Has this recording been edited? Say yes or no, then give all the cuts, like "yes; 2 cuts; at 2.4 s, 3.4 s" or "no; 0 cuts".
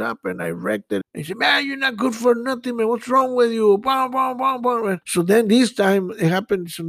yes; 2 cuts; at 1.0 s, 5.0 s